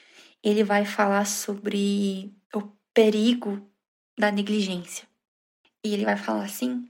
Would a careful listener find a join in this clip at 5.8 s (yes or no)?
no